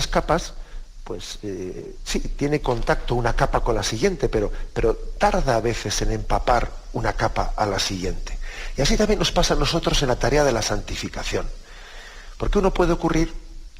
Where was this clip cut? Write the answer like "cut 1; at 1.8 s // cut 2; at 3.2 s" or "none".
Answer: none